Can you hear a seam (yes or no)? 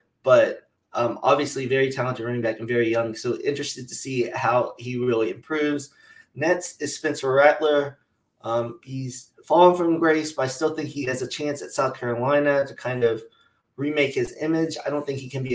no